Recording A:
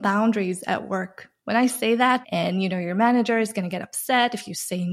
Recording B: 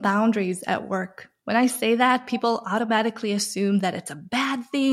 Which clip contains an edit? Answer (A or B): A